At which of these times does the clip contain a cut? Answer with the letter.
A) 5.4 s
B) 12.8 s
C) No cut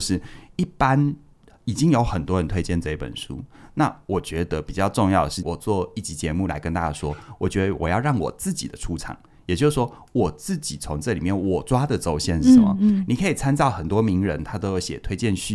A